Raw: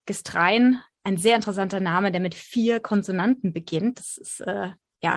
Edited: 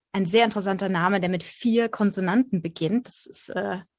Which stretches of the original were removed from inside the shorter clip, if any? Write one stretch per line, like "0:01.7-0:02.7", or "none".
none